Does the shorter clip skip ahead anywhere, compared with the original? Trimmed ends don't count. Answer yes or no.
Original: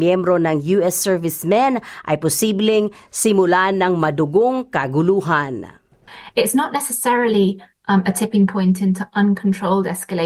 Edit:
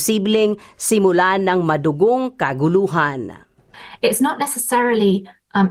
no